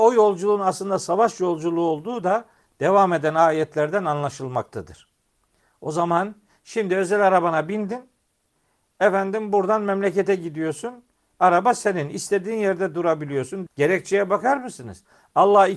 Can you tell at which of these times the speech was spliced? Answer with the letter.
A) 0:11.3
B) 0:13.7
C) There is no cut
B